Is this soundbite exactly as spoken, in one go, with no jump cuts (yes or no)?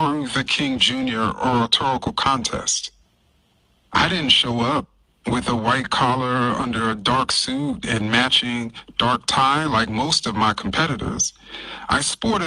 yes